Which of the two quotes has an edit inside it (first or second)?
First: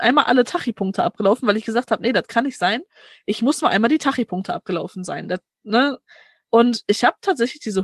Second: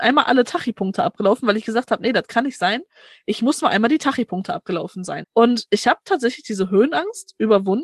second